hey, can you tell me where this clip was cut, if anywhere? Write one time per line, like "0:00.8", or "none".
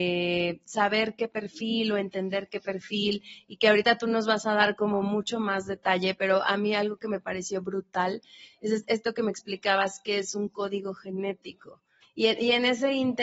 0:12.0